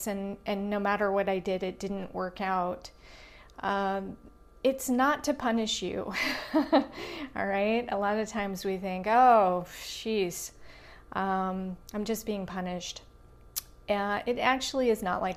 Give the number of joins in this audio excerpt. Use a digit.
0